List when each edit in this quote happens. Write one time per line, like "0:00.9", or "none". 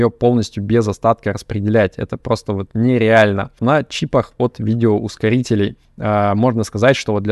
0:03.6
0:05.8